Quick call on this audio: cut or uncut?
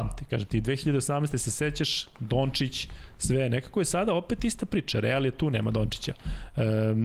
uncut